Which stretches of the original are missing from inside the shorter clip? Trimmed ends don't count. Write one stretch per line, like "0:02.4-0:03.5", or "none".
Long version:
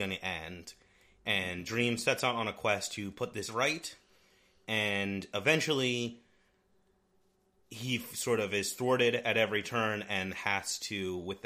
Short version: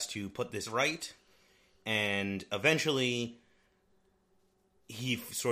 none